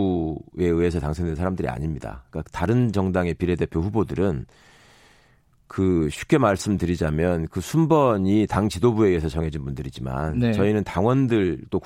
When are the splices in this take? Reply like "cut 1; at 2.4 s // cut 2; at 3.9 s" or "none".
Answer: none